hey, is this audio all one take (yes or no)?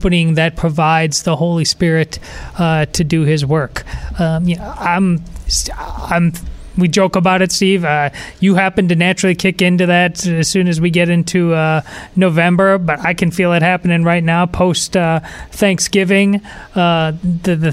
yes